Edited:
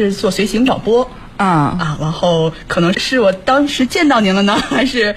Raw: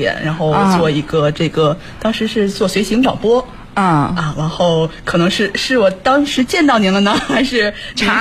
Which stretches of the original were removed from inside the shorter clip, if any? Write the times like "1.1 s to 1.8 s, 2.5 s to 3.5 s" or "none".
5.3 s to 5.5 s

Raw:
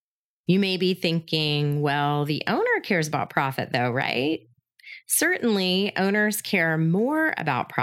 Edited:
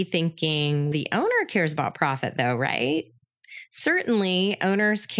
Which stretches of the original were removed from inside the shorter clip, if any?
1.8 s to 2.3 s

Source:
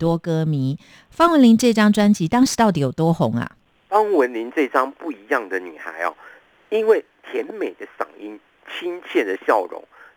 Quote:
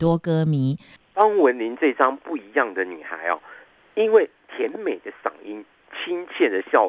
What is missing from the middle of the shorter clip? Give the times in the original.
1.0 s to 3.7 s

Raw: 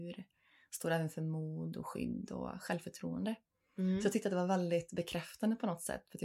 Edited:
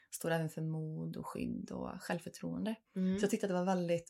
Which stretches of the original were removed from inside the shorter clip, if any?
3.4 s to 3.7 s

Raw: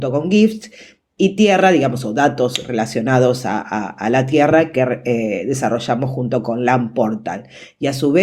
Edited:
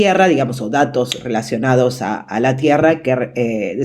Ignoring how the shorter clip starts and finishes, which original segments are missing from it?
3.6 s to 3.9 s

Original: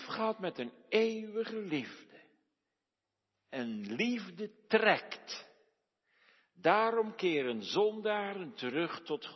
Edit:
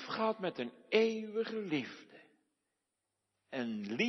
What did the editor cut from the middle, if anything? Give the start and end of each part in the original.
none

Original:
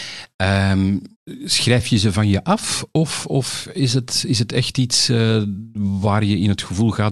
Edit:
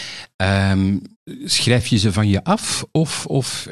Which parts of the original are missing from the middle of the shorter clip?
none

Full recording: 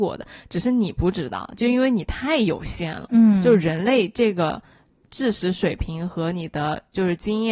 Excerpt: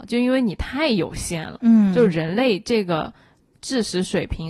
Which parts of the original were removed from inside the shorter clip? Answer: none

